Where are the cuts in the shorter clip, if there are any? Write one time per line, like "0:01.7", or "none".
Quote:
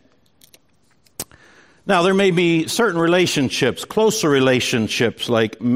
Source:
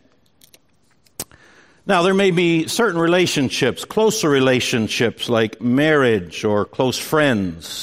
none